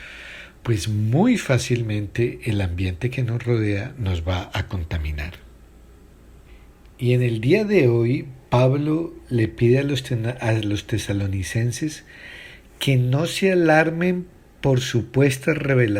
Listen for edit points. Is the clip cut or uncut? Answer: uncut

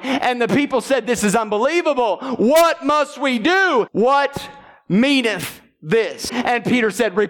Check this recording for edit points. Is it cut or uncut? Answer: cut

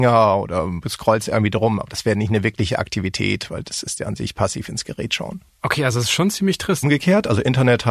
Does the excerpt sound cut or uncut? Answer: cut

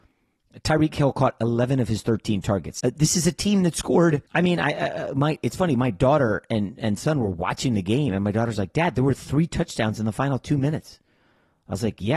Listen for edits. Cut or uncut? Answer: cut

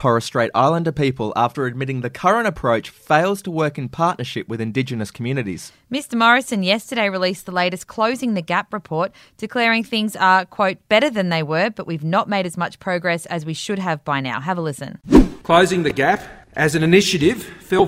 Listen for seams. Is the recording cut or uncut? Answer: uncut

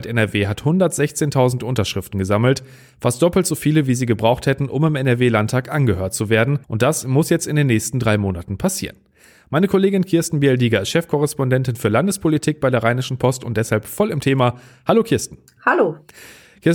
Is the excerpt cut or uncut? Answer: cut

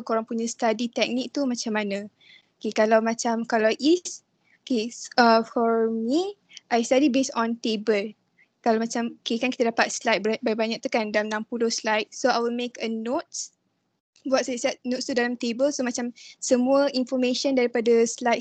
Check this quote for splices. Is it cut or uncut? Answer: uncut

